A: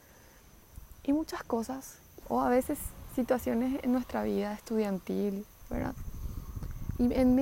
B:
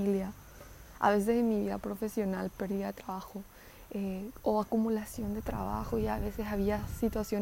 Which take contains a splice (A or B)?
A